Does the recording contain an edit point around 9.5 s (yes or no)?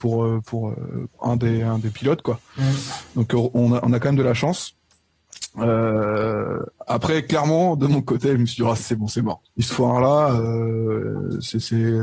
yes